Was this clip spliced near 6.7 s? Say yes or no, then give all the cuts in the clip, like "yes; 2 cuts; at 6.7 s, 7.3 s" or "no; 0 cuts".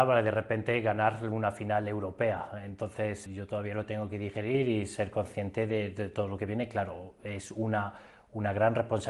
no; 1 cut; at 3.3 s